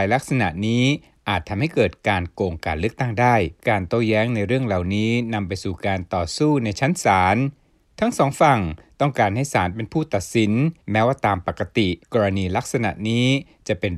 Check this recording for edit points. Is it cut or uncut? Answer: cut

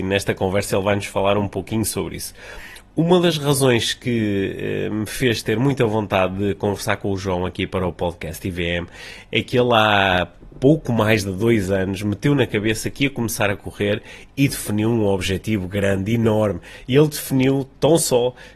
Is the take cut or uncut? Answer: uncut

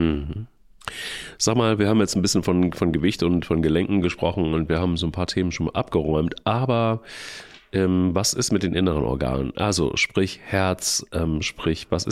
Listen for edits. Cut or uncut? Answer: uncut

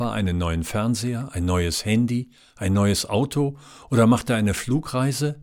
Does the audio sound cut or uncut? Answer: uncut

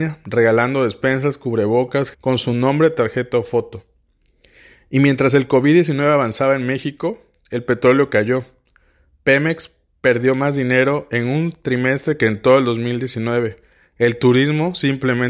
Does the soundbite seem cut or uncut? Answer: cut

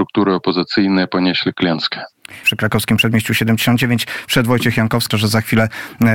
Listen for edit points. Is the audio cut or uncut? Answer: cut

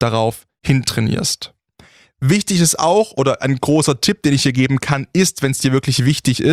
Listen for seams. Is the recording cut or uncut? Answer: uncut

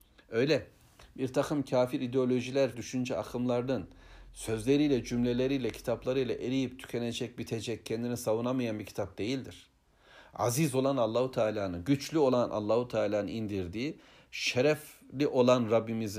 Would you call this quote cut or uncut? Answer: cut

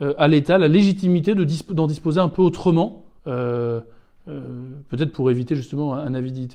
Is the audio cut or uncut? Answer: cut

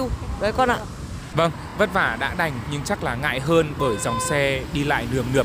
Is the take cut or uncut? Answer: uncut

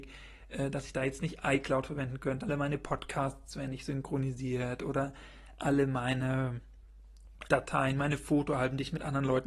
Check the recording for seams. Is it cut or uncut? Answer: cut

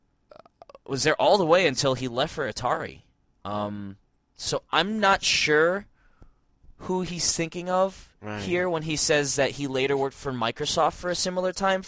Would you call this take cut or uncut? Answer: uncut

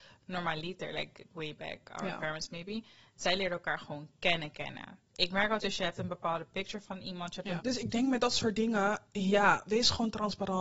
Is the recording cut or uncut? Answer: cut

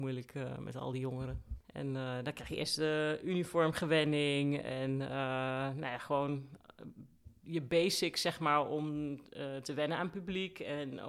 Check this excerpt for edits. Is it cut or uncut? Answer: cut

